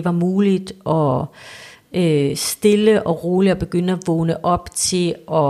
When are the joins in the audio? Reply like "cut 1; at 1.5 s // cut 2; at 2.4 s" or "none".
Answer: none